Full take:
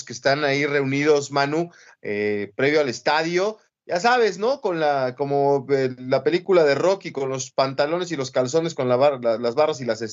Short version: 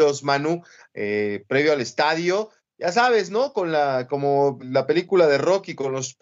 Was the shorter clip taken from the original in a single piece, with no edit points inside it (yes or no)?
no